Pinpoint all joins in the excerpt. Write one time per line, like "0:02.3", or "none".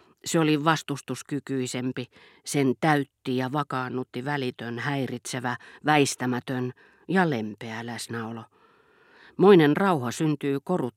none